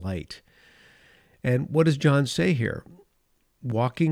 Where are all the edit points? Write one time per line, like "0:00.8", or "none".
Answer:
none